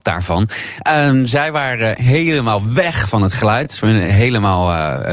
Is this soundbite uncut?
yes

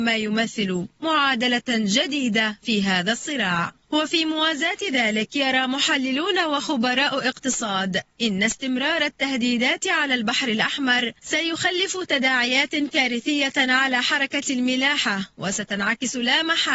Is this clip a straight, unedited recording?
no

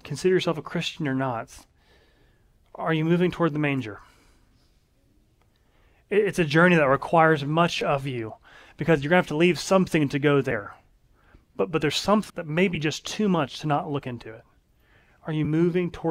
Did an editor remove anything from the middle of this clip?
yes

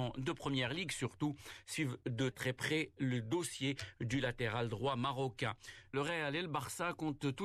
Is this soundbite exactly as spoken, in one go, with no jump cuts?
no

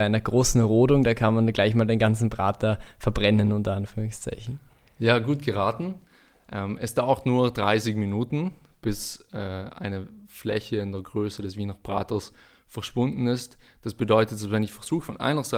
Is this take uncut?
yes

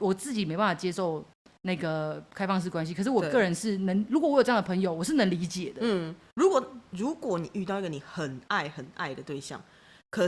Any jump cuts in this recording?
no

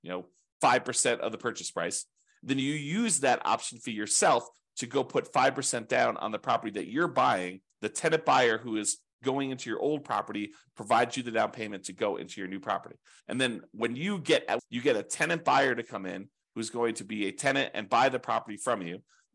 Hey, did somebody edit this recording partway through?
yes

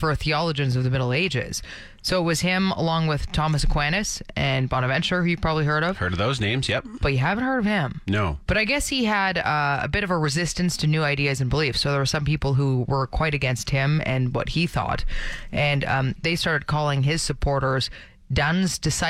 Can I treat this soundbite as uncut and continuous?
no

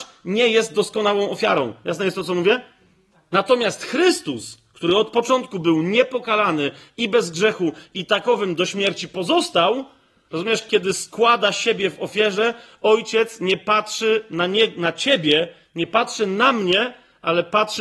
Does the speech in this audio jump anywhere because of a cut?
no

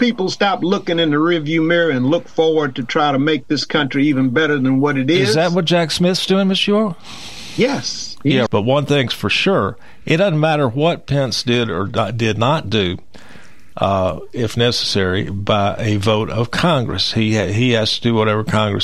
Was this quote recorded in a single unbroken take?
no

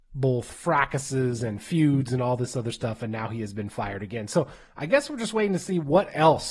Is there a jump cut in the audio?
no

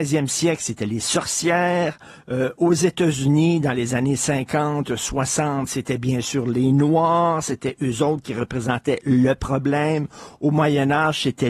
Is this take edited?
no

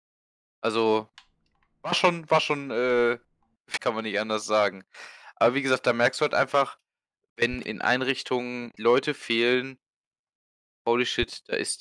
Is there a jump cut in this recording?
yes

